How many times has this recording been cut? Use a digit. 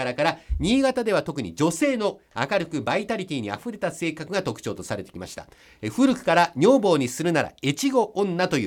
0